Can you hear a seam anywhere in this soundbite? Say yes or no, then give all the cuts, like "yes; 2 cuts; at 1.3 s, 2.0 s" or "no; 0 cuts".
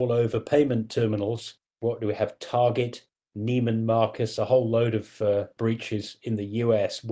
no; 0 cuts